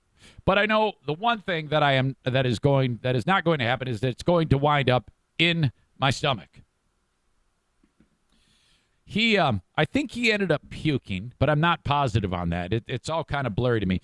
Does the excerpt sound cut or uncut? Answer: cut